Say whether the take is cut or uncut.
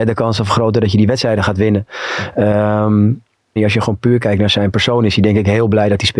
cut